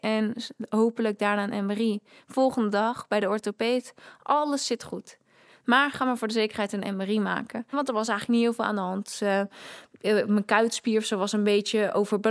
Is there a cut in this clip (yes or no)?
yes